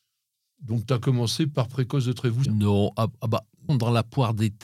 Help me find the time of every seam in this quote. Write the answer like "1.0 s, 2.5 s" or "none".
2.5 s, 3.7 s